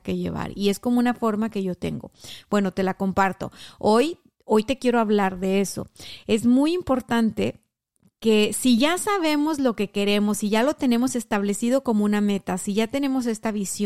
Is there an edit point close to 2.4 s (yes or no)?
no